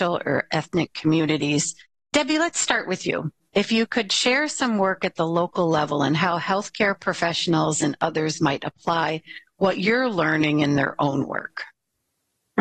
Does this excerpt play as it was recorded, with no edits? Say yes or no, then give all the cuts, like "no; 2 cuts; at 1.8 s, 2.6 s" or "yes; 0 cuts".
yes; 0 cuts